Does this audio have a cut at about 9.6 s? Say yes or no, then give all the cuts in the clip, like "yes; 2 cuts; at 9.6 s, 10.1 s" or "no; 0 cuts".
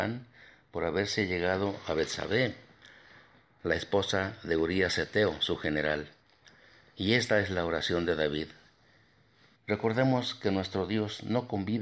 yes; 1 cut; at 9.6 s